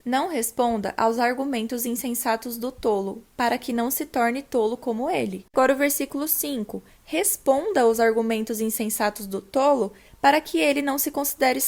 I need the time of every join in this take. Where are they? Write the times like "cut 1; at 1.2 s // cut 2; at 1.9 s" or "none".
none